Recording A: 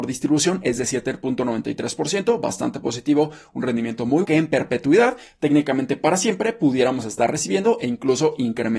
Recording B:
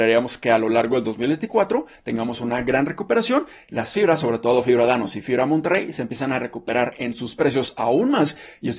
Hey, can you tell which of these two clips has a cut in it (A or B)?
A